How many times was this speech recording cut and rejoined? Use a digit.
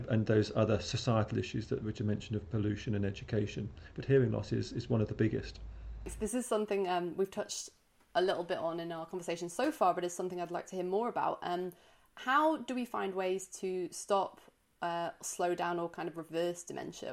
0